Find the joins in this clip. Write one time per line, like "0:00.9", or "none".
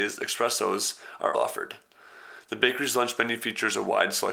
0:01.3

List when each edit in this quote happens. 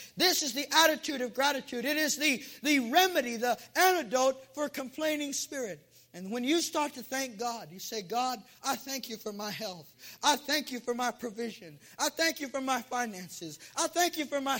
none

